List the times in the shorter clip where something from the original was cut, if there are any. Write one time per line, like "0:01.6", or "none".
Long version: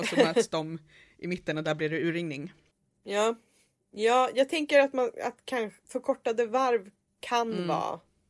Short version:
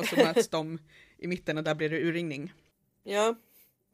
none